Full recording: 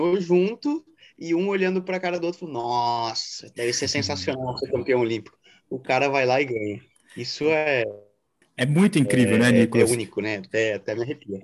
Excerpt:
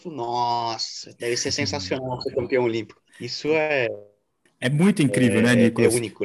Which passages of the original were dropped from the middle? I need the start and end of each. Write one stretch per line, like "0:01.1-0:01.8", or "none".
0:05.4-0:07.0